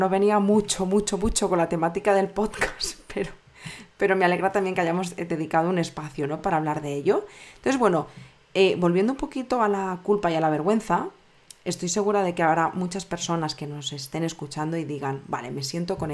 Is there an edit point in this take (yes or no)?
no